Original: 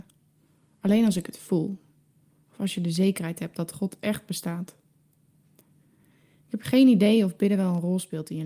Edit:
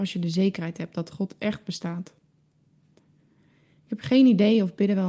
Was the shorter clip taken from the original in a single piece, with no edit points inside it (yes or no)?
yes